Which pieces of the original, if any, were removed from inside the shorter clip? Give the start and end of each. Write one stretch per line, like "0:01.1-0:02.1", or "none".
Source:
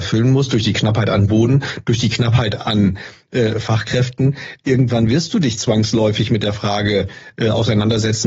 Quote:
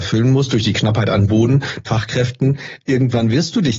0:01.8-0:03.6